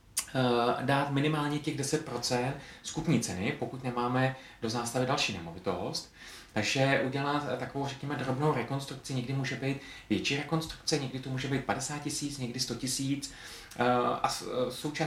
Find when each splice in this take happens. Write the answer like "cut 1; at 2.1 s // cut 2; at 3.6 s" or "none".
cut 1; at 6.5 s